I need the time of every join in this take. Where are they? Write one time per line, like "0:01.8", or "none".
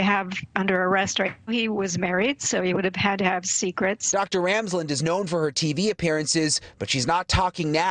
0:01.5